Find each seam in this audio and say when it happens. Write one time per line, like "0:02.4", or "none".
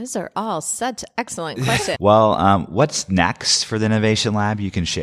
0:01.9